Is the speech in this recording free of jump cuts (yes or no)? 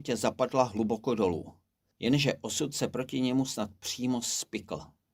no